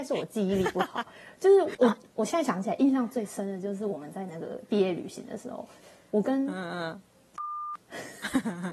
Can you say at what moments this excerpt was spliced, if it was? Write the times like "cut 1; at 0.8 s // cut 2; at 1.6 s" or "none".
cut 1; at 1.7 s